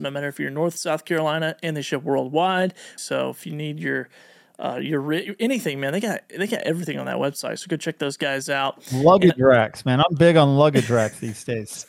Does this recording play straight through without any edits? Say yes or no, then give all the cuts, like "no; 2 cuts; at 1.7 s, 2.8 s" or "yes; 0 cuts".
no; 1 cut; at 3.0 s